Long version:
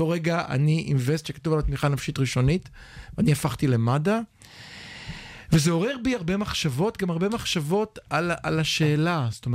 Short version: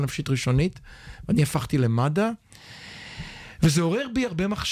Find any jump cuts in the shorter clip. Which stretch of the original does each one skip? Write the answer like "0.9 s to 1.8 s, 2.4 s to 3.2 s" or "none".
none